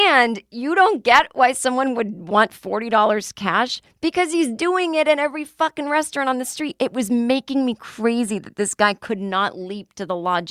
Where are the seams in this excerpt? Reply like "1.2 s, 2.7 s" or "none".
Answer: none